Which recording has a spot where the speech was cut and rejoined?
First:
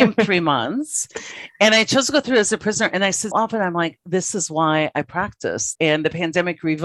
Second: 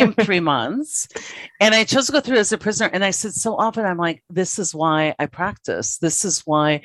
first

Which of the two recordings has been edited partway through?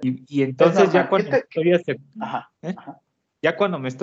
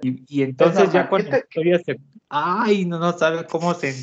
second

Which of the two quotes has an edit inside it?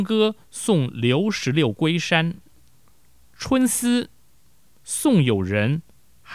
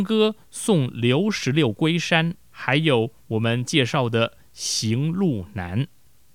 second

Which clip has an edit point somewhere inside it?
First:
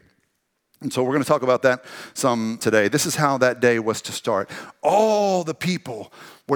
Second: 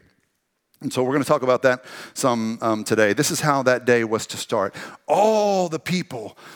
first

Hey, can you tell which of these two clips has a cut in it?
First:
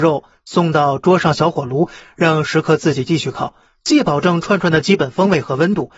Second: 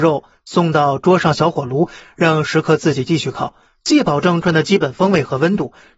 second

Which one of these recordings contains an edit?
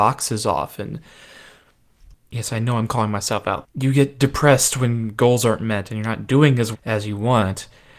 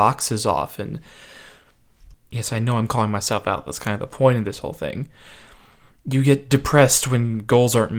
first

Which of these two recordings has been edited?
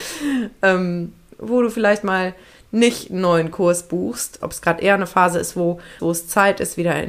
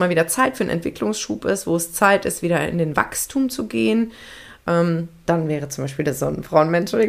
first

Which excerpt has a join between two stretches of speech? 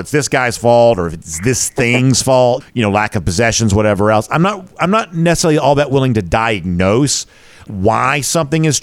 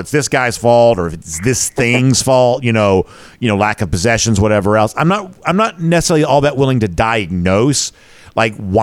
first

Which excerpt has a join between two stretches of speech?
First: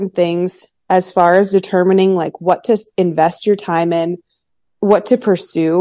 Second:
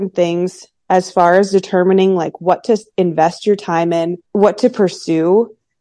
second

